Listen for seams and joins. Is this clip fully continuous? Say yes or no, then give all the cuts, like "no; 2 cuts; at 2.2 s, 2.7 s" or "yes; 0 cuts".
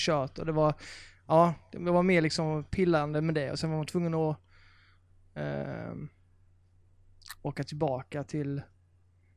yes; 0 cuts